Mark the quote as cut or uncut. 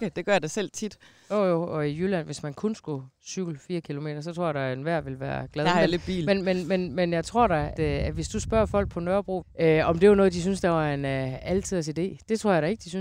cut